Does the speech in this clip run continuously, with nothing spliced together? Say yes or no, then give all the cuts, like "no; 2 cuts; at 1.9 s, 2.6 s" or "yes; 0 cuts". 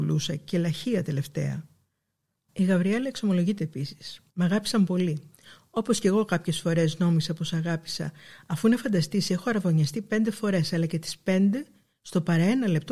no; 2 cuts; at 2.5 s, 4.3 s